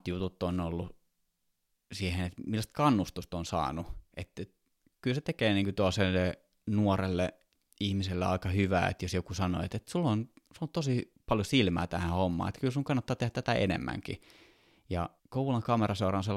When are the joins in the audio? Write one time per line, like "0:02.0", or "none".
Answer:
0:15.2